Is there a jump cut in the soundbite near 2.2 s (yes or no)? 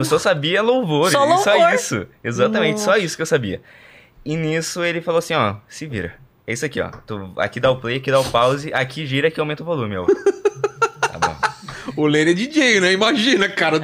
no